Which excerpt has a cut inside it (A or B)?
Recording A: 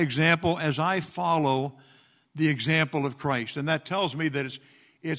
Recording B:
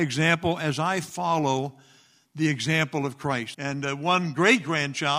B